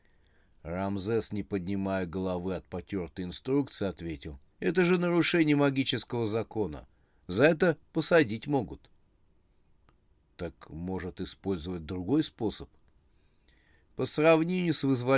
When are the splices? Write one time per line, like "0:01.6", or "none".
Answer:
0:04.5